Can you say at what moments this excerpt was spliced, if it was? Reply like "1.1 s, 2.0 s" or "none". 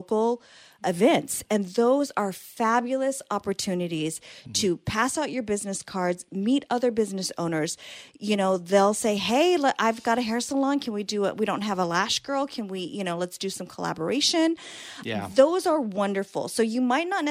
none